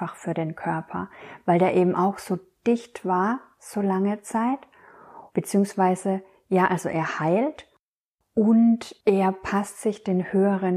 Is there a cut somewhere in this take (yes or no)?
yes